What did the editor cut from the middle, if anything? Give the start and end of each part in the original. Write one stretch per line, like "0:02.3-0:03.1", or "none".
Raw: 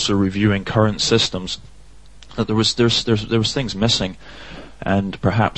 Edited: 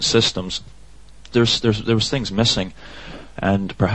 0:02.3-0:02.8